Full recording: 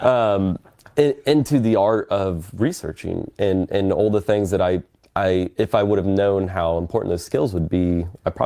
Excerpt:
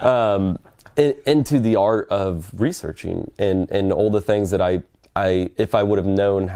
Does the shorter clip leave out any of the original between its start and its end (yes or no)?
no